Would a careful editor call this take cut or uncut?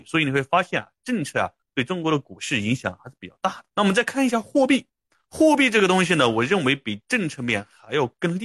cut